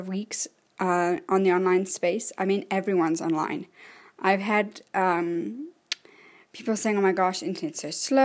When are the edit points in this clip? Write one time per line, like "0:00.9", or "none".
none